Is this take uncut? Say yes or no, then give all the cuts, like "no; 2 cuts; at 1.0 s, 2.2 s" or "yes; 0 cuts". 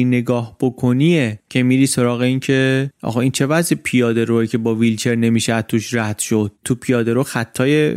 no; 1 cut; at 6.6 s